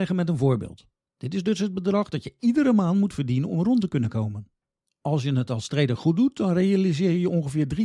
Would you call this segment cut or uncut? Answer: cut